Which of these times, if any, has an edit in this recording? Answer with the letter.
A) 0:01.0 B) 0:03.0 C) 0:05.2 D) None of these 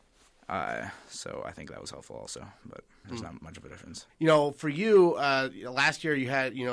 B